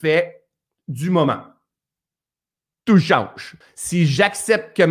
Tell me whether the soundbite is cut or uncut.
cut